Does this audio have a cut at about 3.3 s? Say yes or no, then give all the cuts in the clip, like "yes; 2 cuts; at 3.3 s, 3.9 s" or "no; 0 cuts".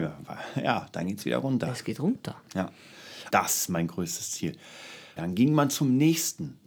yes; 2 cuts; at 3.3 s, 5.2 s